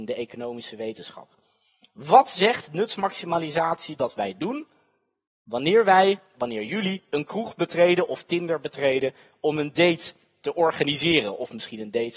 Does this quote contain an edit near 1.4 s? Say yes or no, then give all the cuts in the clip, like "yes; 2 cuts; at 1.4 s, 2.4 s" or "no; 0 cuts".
no; 1 cut; at 6.3 s